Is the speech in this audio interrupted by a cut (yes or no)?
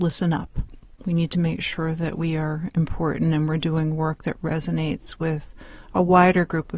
yes